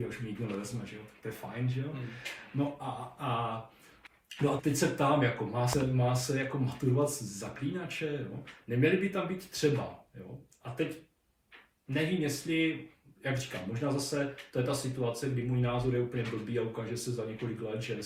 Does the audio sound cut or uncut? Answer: cut